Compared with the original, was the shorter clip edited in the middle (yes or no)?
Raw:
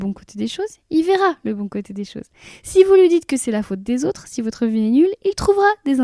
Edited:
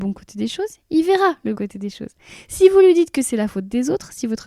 yes